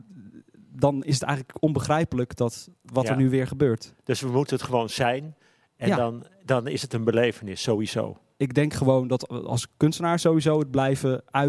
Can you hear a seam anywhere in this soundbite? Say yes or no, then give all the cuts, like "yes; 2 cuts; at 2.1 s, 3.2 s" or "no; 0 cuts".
no; 0 cuts